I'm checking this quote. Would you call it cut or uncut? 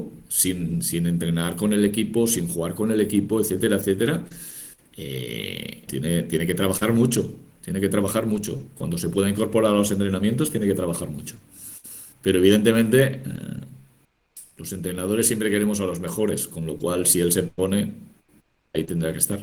cut